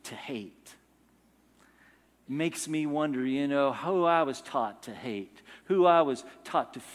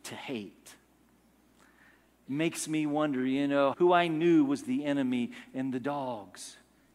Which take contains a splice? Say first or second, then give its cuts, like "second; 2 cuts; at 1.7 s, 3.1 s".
second; 1 cut; at 3.7 s